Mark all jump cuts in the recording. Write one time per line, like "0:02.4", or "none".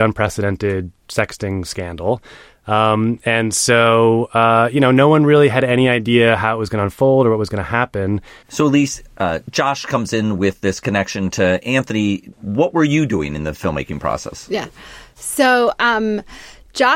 0:08.4
0:12.3